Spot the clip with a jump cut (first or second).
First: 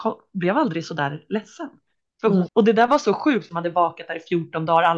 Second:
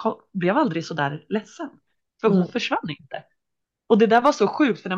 first